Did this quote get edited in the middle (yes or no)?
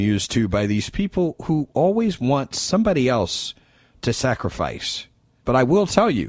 yes